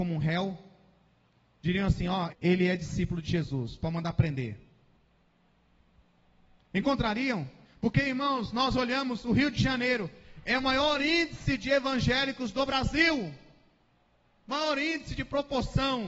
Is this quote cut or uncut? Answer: cut